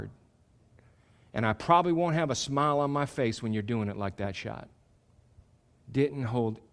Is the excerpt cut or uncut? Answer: cut